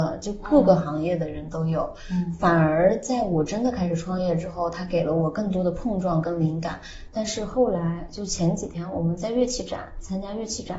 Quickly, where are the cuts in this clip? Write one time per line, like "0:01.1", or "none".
0:07.1